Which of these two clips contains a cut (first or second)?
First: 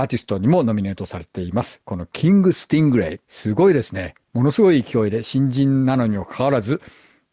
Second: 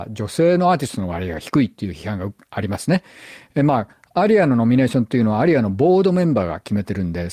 first